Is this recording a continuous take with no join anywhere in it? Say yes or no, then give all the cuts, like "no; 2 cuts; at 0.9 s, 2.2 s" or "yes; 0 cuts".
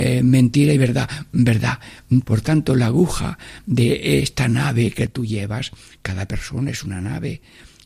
no; 1 cut; at 2.2 s